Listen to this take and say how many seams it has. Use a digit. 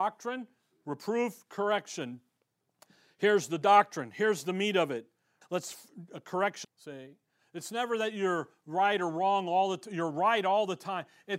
2